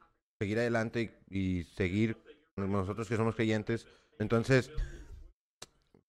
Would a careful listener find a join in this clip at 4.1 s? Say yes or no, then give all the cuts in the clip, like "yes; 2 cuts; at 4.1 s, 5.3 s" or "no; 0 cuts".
yes; 1 cut; at 4.1 s